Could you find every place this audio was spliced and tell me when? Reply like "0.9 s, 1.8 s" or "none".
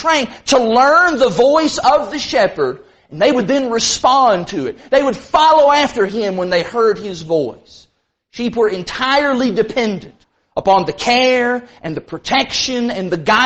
none